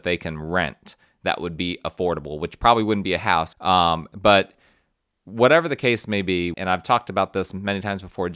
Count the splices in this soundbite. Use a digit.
2